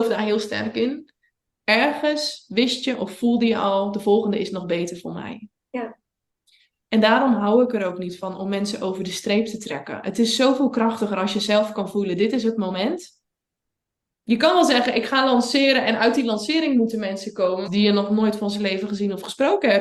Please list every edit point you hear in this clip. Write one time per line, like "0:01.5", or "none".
0:14.1
0:17.6